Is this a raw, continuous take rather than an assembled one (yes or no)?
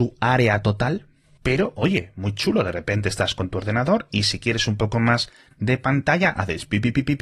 yes